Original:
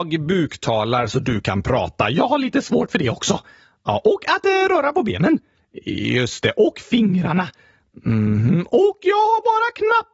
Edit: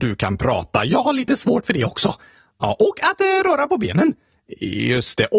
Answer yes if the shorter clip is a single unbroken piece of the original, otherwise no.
yes